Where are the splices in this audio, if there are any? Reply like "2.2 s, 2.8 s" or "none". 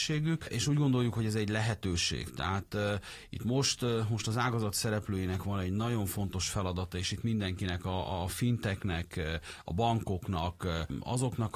none